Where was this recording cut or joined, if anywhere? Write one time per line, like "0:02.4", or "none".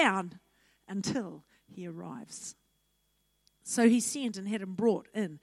none